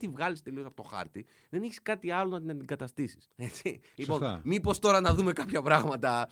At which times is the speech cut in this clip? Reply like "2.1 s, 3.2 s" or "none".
3.2 s